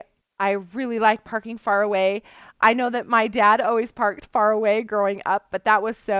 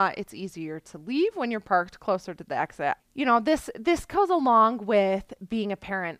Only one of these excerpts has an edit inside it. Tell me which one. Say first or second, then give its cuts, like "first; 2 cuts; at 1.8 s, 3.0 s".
second; 1 cut; at 3.0 s